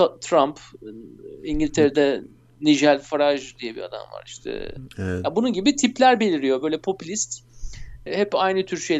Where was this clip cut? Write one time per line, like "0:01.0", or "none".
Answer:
0:08.1

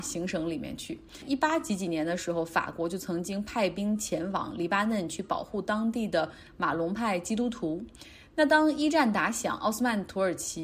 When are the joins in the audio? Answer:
none

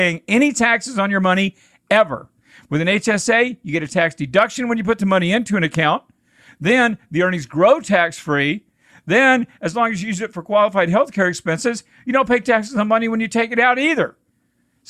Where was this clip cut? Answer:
none

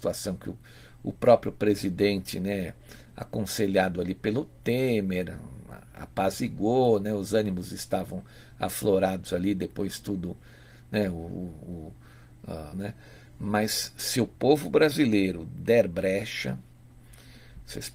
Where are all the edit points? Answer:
0:12.7

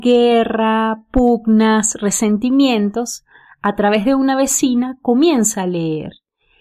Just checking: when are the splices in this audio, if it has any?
none

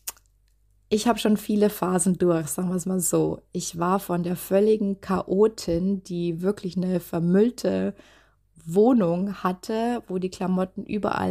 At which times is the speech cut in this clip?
none

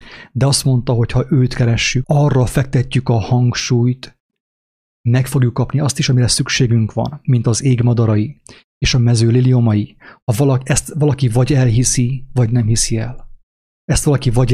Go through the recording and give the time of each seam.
0:02.0

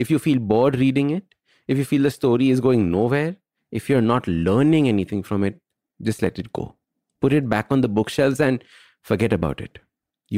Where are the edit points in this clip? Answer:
none

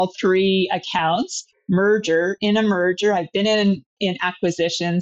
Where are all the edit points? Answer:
0:04.0

